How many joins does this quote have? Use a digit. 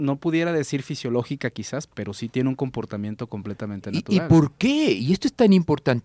1